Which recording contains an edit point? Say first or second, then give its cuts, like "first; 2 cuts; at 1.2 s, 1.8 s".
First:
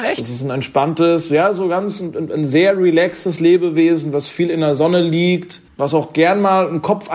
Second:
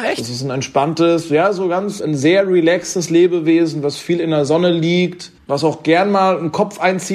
second; 1 cut; at 2.0 s